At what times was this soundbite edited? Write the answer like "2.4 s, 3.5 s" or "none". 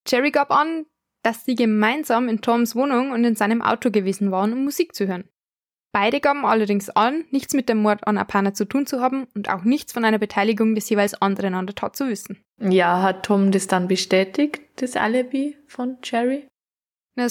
none